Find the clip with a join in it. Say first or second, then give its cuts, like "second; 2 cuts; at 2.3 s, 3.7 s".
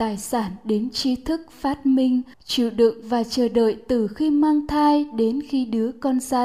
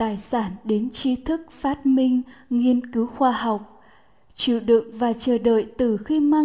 first; 1 cut; at 2.3 s